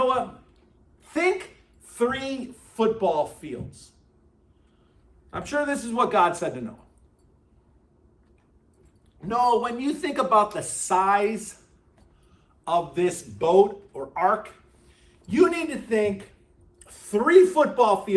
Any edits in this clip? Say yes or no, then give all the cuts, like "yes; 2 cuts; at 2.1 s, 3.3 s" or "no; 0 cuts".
no; 0 cuts